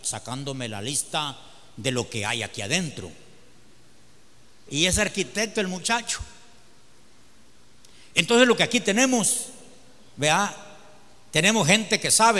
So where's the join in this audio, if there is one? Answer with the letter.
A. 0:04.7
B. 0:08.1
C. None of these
A